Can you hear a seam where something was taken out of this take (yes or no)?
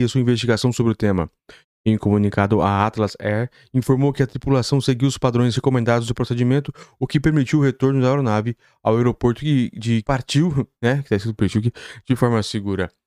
yes